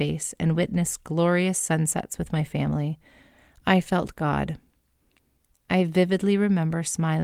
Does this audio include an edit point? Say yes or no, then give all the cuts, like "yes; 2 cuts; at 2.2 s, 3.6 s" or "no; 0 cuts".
no; 0 cuts